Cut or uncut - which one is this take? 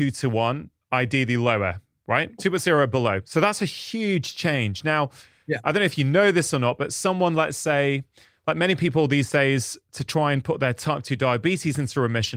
cut